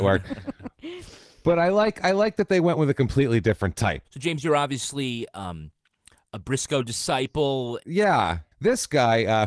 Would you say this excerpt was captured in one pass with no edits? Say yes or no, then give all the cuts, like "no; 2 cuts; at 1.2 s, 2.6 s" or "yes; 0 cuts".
no; 2 cuts; at 4.0 s, 8.5 s